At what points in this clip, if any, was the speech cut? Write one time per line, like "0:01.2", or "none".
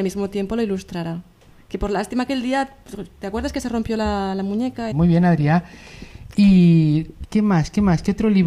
0:04.9
0:07.2